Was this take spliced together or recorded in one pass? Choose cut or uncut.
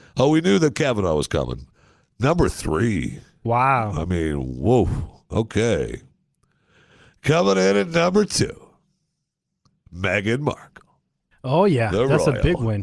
uncut